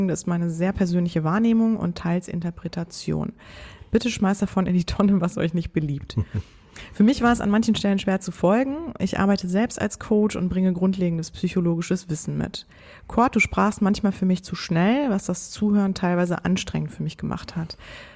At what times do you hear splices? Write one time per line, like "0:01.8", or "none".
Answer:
none